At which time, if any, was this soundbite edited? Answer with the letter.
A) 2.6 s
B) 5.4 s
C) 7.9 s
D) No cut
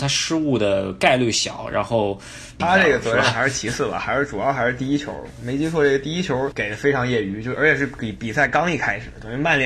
A